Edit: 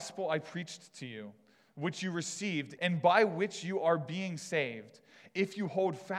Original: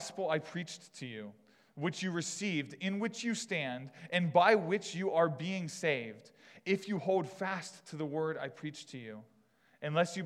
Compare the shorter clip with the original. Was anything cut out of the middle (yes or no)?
yes